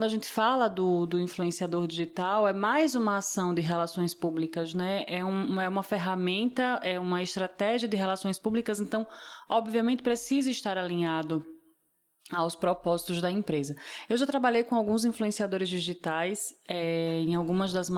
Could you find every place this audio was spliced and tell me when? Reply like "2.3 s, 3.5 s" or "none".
none